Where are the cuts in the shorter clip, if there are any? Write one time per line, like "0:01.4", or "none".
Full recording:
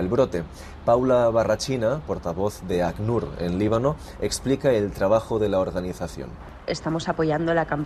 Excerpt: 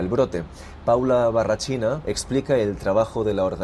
0:02.0